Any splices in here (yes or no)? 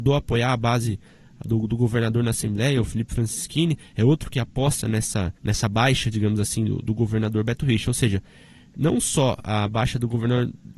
yes